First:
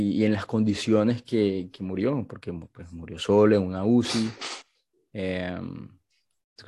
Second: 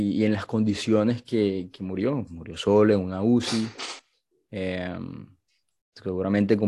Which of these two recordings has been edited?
second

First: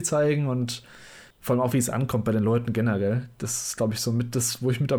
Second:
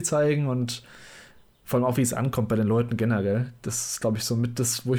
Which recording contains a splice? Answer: first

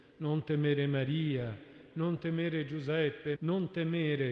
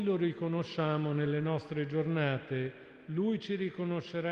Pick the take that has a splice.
first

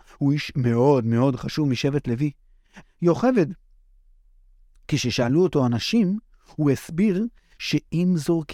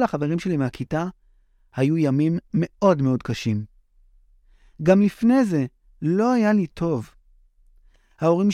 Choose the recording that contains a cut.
first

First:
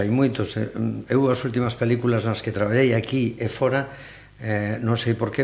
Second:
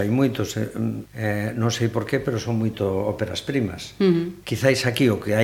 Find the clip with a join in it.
second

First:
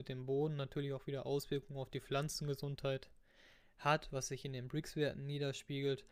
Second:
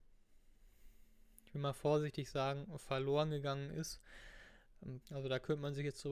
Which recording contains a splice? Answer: second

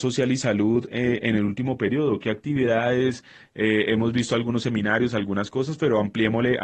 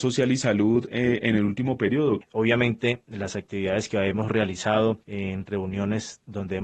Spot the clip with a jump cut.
second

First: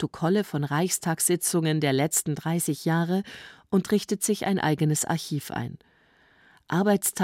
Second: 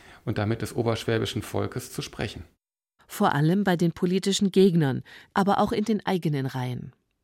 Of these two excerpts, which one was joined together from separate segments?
second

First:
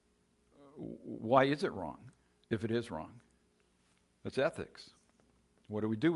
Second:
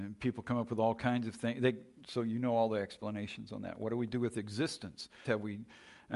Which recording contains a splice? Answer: second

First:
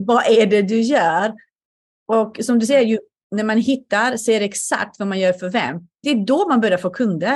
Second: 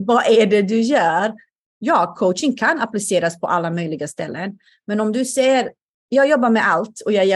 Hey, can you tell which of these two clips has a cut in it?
second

